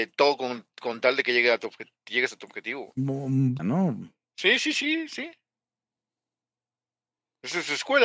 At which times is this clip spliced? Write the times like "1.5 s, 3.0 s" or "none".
3.6 s